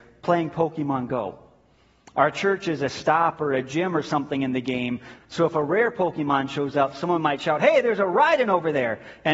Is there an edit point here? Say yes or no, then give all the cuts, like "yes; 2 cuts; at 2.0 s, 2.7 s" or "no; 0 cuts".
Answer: yes; 1 cut; at 5.2 s